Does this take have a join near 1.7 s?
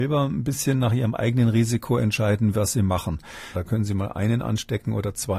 no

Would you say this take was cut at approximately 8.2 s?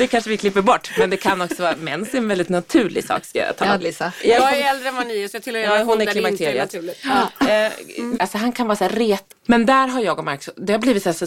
yes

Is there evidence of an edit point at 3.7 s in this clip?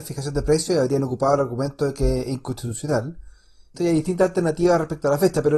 yes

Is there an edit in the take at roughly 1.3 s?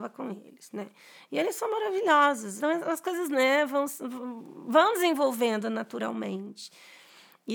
no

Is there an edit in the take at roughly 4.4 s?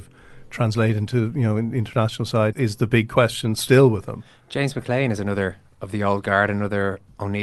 no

